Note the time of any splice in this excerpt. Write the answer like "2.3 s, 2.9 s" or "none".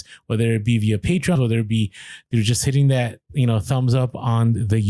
1.4 s